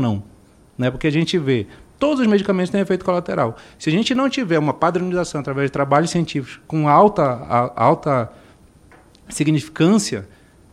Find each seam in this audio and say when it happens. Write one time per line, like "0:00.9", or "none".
none